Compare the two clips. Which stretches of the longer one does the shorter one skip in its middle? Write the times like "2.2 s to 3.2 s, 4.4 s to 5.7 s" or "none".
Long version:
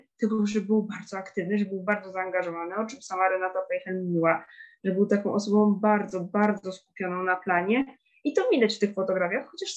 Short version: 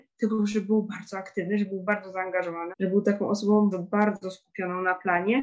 2.7 s to 4.7 s, 5.8 s to 6.1 s